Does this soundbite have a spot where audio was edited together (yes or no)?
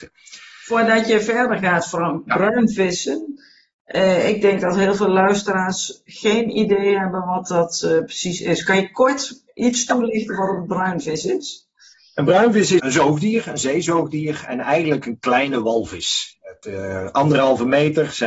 yes